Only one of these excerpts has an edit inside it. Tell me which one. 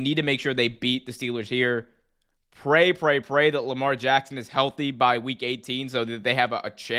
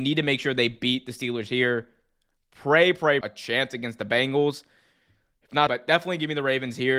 second; 2 cuts; at 3.2 s, 5.7 s

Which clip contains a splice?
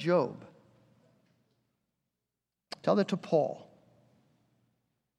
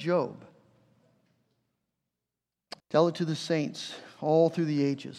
second; 1 cut; at 2.8 s

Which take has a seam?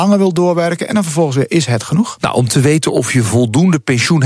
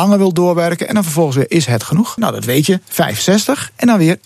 second; 1 cut; at 2.2 s

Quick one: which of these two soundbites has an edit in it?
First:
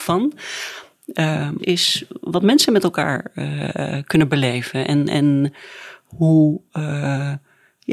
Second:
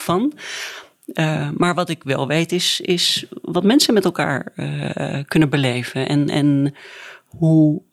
first; 1 cut; at 1.6 s

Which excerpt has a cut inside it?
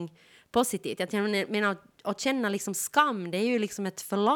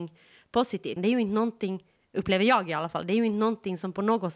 second; 1 cut; at 1.0 s

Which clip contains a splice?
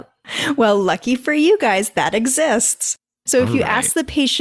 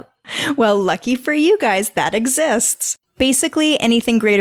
second; 1 cut; at 3.0 s

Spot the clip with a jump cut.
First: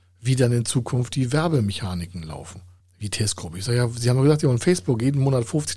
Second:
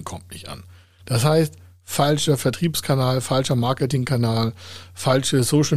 first; 1 cut; at 2.8 s

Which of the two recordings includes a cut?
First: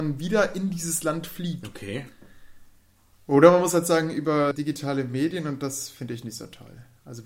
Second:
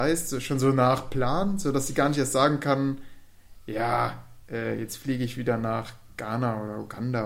first; 2 cuts; at 3.1 s, 4.5 s

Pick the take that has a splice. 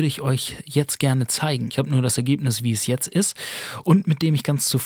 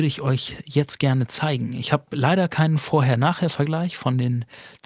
first; 1 cut; at 1.7 s

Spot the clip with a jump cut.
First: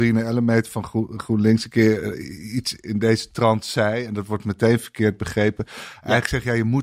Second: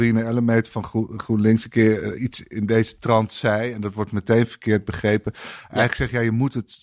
second; 1 cut; at 2.2 s

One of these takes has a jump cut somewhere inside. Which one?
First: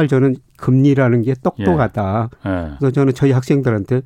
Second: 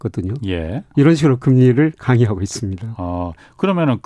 second; 1 cut; at 0.9 s

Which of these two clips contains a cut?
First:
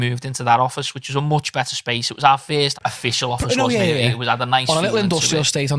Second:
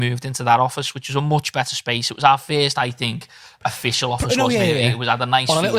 first; 1 cut; at 2.7 s

